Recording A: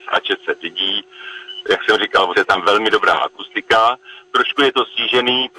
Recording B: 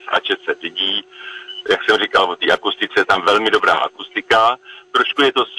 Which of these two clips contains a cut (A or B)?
A